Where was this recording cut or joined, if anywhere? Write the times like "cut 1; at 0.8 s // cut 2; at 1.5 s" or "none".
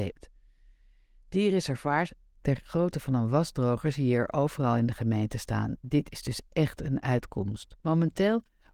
cut 1; at 7.8 s